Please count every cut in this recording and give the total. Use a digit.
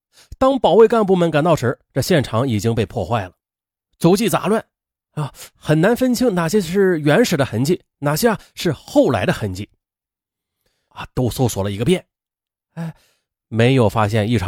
1